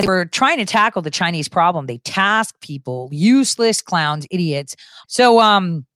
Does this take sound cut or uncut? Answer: cut